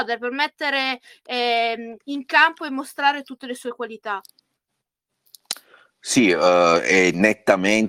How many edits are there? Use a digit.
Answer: 0